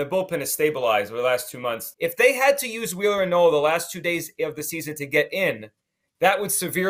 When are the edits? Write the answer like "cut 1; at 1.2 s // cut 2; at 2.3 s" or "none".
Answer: cut 1; at 1.9 s

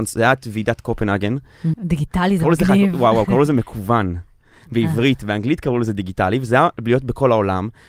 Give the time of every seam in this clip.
cut 1; at 1.7 s

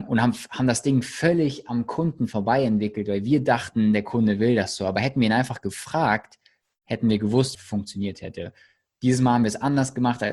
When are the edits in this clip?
cut 1; at 7.5 s

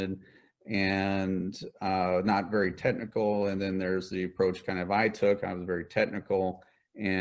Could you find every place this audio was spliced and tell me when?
none

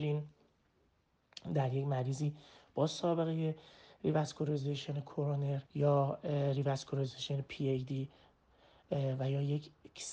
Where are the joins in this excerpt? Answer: cut 1; at 5.7 s

